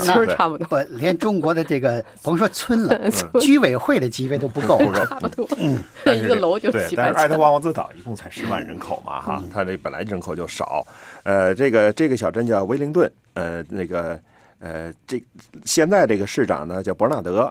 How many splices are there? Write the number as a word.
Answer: one